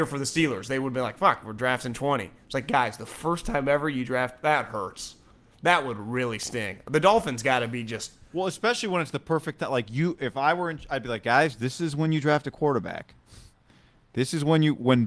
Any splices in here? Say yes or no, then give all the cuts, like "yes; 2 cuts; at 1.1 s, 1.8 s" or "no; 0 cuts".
no; 0 cuts